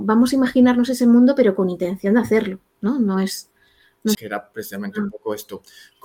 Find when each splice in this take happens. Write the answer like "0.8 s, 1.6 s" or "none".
4.1 s